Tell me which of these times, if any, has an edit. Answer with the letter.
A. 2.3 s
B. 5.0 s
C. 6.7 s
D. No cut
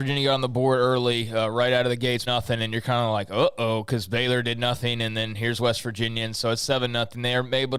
A